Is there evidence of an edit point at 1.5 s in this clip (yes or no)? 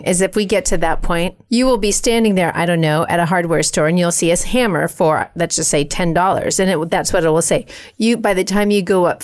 yes